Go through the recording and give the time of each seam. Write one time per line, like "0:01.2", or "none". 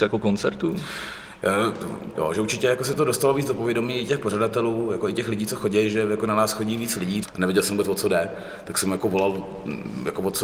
0:02.1
0:07.2